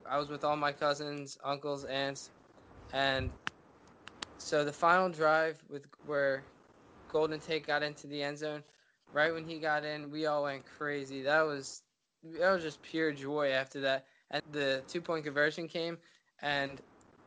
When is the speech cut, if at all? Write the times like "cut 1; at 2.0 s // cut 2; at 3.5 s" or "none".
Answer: cut 1; at 14.4 s